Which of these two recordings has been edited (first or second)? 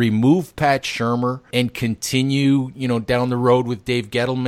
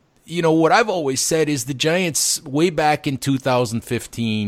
first